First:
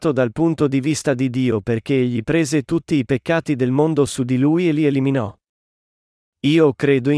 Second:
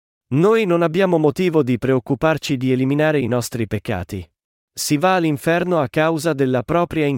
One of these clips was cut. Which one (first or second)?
second